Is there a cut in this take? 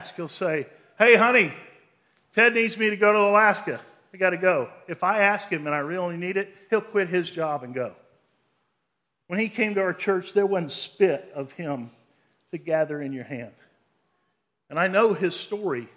no; 0 cuts

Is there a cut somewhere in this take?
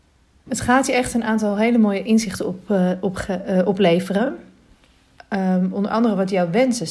no; 0 cuts

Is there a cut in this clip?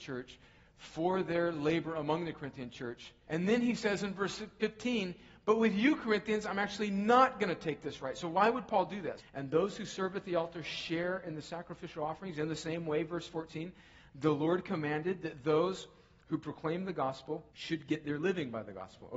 yes; 3 cuts; at 3.3 s, 9.2 s, 17.5 s

